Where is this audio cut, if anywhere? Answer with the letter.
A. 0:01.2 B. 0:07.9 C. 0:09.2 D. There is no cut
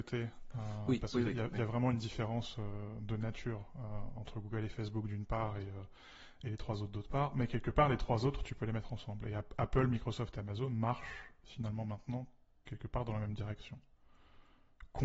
D